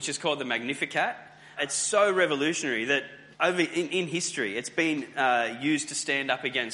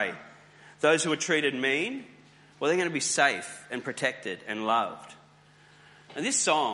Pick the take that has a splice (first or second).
first